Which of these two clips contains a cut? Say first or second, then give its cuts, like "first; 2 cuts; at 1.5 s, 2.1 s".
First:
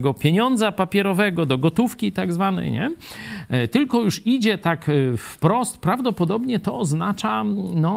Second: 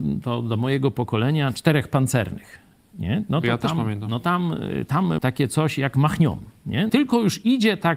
second; 2 cuts; at 5.2 s, 6.9 s